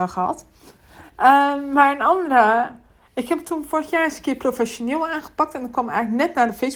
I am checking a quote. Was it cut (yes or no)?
no